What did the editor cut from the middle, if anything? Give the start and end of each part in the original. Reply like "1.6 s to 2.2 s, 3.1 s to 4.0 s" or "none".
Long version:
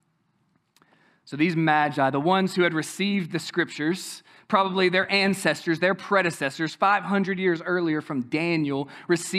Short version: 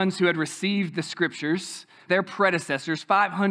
4.4 s to 5.8 s